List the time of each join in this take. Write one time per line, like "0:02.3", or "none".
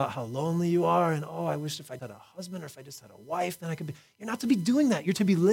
0:02.0